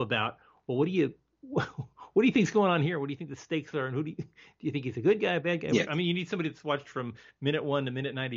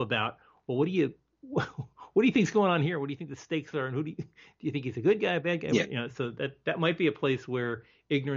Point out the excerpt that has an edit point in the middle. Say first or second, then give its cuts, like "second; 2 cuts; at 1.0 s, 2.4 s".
first; 1 cut; at 5.9 s